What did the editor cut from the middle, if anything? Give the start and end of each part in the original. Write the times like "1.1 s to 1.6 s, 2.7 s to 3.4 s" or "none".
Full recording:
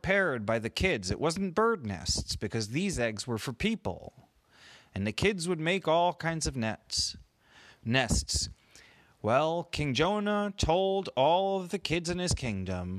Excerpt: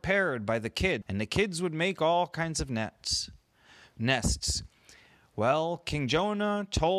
1.0 s to 4.9 s

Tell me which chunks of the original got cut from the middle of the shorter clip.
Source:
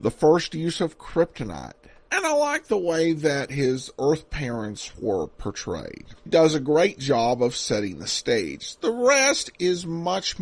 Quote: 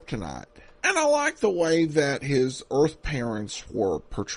none

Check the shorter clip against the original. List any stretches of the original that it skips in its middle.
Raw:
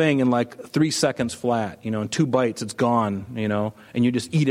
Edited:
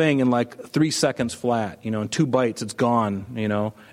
none

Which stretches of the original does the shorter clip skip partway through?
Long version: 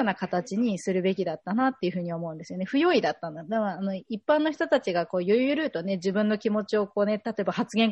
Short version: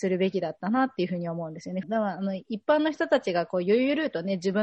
2.7 s to 3.4 s

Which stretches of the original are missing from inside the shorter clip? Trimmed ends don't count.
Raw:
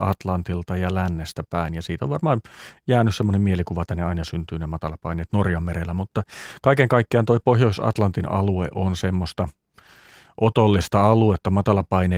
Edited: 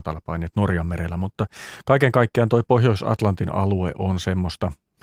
none

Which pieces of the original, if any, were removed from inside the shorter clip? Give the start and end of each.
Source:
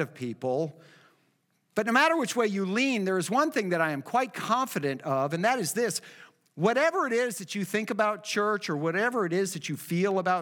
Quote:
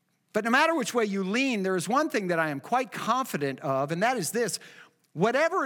none

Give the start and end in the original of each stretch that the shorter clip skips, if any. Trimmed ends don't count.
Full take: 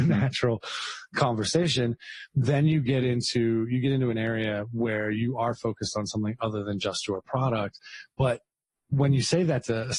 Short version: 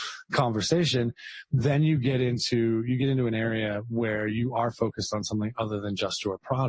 none

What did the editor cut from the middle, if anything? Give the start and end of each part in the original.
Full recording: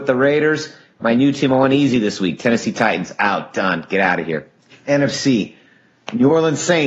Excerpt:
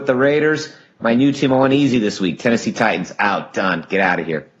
none

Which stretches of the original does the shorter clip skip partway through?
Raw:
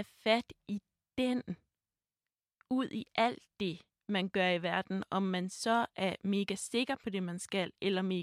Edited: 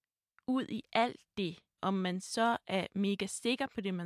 4.0 s to 5.1 s

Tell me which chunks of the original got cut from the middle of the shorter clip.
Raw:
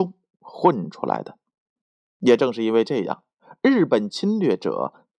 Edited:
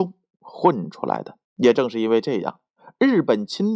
1.4 s to 2.1 s

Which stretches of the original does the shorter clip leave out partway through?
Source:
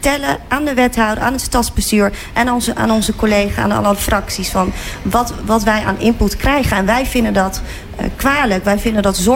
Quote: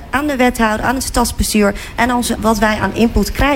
2.7 s to 5.4 s

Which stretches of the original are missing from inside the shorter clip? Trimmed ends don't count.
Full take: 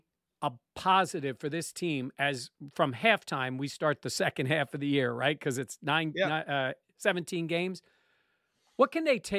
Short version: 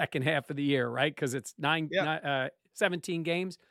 none

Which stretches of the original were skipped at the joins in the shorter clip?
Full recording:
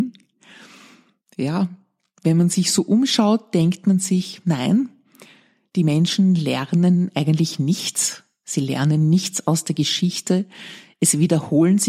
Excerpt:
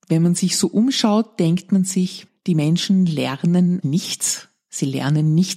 4.4 s to 5.6 s, 7.1 s to 7.6 s

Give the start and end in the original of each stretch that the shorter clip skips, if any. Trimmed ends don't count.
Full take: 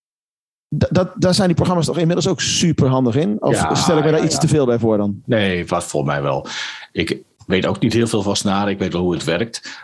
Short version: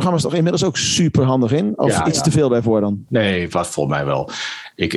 3.7 s to 4.2 s

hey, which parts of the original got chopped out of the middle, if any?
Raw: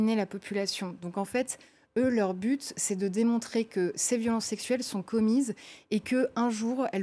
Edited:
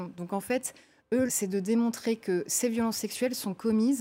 2.1 s to 2.7 s

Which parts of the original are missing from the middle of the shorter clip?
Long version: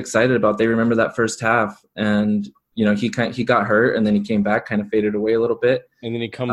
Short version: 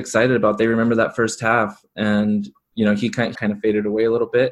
3.3 s to 4.6 s

